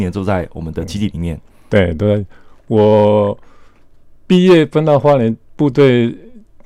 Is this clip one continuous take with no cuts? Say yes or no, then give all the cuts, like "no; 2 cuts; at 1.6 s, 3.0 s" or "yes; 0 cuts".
yes; 0 cuts